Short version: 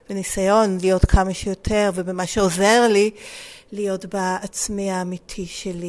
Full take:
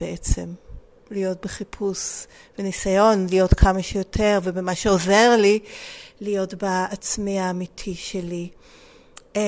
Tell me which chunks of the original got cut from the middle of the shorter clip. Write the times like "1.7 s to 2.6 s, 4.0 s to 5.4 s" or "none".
none